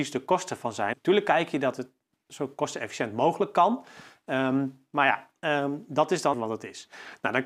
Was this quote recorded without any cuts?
no; 2 cuts; at 0.9 s, 6.3 s

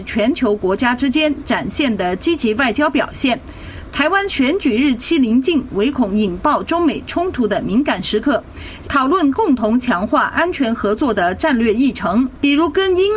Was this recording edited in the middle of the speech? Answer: yes; 2 cuts; at 3.9 s, 8.8 s

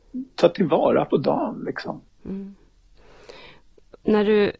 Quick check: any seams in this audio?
yes; 1 cut; at 2.1 s

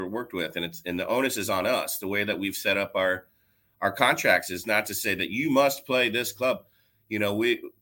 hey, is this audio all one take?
yes; 0 cuts

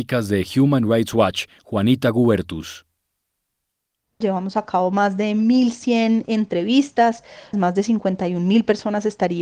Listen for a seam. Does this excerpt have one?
yes; 2 cuts; at 4.2 s, 7.5 s

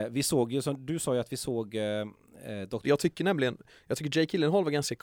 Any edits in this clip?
yes; 1 cut; at 2.8 s

